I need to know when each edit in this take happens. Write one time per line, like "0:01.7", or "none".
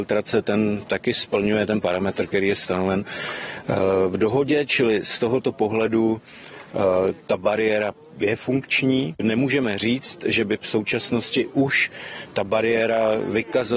0:09.2